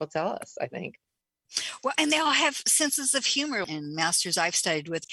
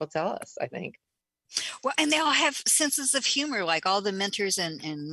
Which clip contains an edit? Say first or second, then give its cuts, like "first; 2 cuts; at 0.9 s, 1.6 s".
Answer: first; 1 cut; at 3.6 s